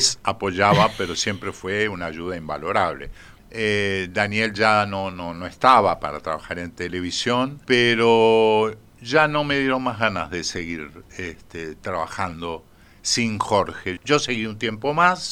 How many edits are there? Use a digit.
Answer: 3